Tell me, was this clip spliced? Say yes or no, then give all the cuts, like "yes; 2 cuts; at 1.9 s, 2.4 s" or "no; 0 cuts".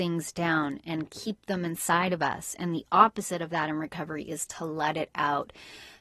no; 0 cuts